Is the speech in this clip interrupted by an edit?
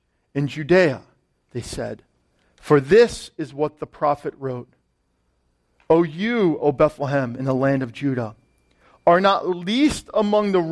no; 0 cuts

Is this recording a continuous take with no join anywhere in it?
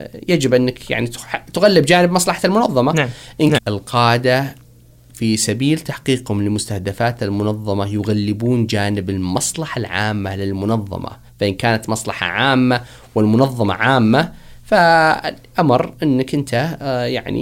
no; 1 cut; at 3.6 s

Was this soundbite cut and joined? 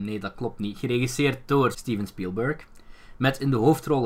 yes; 1 cut; at 1.7 s

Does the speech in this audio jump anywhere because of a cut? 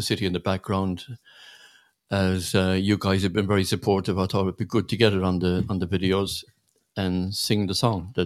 no; 0 cuts

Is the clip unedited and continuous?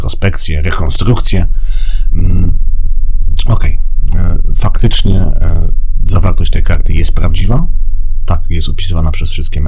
yes; 0 cuts

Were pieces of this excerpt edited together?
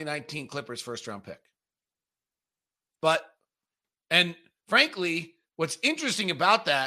yes; 1 cut; at 3.0 s

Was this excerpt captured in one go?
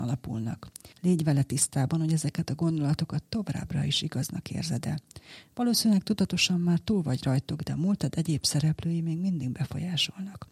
no; 1 cut; at 0.9 s

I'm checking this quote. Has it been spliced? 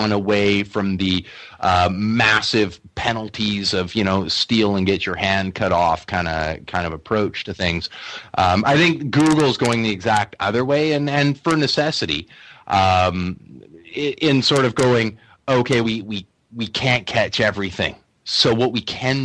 yes; 1 cut; at 15.8 s

